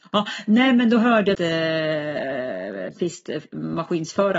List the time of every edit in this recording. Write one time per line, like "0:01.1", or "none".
0:01.3